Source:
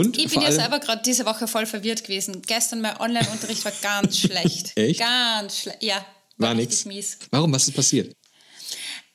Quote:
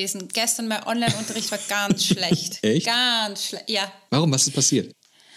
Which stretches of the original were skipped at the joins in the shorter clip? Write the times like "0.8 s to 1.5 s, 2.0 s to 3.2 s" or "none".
6.2 s to 7.3 s